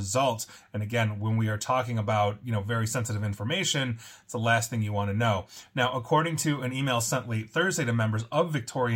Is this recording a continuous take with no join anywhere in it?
yes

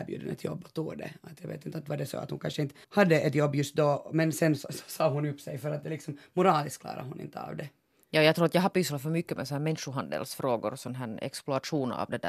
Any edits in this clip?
yes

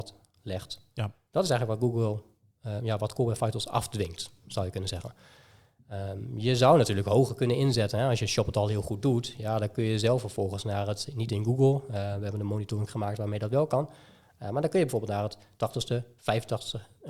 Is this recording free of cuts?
yes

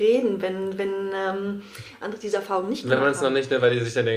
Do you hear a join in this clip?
no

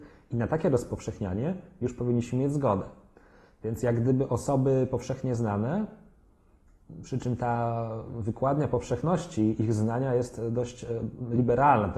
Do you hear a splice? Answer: no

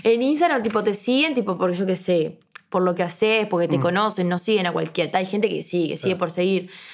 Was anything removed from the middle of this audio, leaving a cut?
no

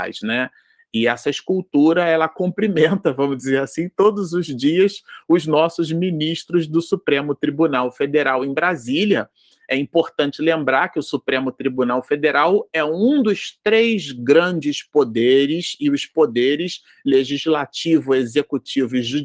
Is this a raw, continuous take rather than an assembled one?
yes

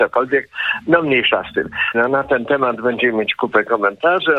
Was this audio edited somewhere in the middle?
yes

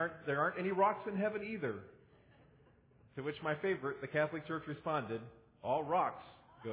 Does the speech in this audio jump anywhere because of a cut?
no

